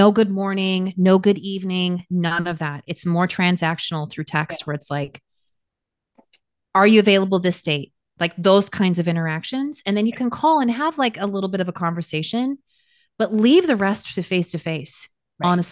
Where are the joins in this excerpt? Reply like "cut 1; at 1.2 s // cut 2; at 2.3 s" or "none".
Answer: none